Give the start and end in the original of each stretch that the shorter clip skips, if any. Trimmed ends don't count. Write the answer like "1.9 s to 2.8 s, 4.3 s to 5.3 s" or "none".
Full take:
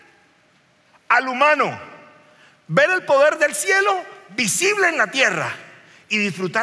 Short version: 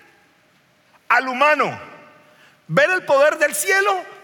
none